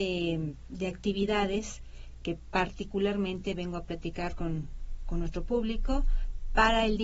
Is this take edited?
no; 0 cuts

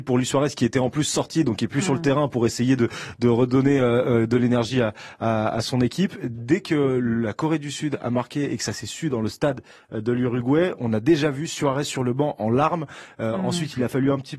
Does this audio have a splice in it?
no; 0 cuts

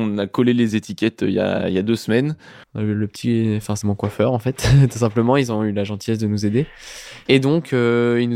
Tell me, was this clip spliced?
yes; 3 cuts; at 2.6 s, 3.8 s, 7.3 s

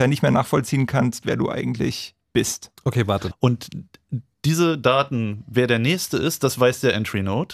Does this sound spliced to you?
yes; 1 cut; at 3.3 s

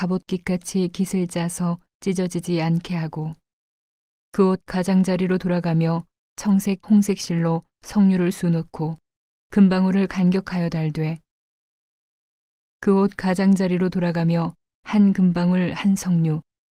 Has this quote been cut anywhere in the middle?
yes; 1 cut; at 6.8 s

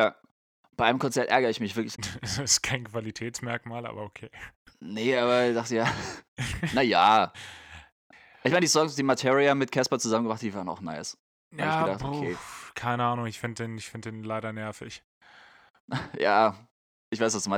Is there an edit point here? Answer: yes; 1 cut; at 1.9 s

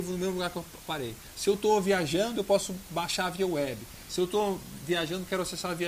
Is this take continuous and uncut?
yes; 0 cuts

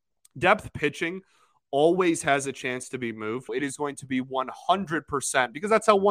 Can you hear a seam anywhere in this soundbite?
yes; 1 cut; at 3.5 s

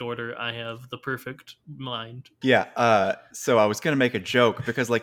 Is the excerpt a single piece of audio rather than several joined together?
no; 1 cut; at 2.4 s

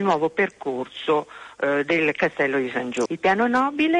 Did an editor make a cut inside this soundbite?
yes; 1 cut; at 3.1 s

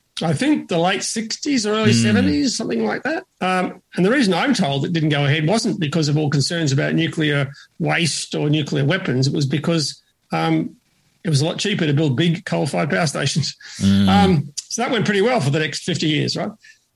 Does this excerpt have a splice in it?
no; 0 cuts

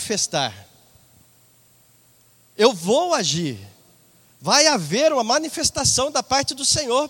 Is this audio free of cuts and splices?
yes; 0 cuts

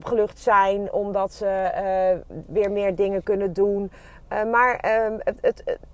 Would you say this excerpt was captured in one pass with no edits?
yes; 0 cuts

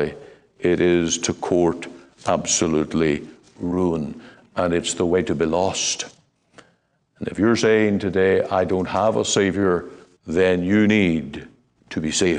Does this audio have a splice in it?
yes; 1 cut; at 10.1 s

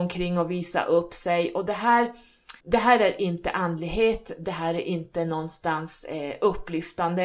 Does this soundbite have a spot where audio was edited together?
yes; 1 cut; at 2.6 s

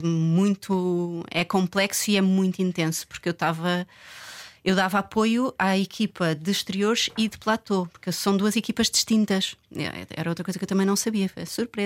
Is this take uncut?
yes; 0 cuts

